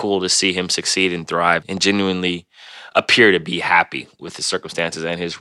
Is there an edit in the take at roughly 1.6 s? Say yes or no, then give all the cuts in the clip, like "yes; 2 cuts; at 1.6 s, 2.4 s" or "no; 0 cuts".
yes; 1 cut; at 1.6 s